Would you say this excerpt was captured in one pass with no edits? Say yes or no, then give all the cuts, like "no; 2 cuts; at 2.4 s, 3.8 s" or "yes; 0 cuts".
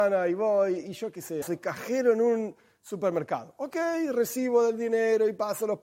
no; 1 cut; at 1.4 s